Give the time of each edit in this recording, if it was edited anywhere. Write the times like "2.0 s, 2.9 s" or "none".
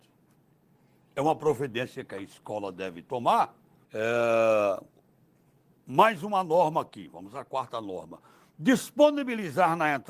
3.8 s